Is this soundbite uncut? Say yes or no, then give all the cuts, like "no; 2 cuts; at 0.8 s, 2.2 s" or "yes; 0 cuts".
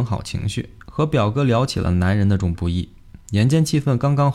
no; 1 cut; at 2.4 s